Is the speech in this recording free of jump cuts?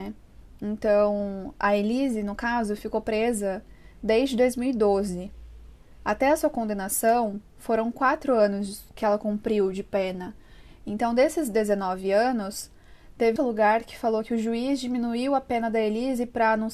no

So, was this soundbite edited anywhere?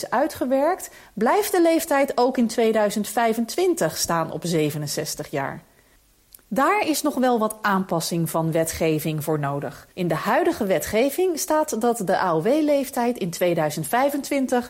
yes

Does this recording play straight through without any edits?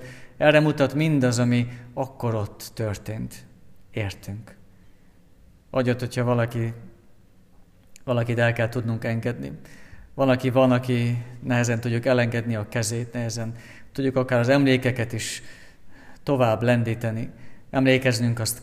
no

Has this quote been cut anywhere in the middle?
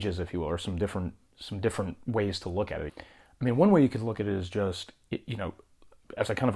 yes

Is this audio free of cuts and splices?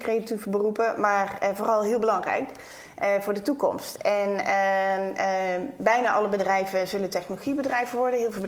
yes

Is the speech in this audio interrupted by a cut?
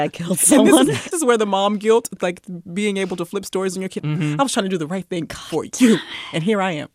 yes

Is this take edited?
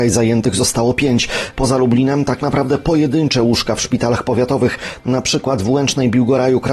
yes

